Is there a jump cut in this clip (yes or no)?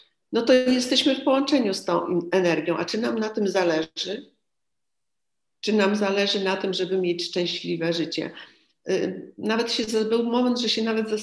no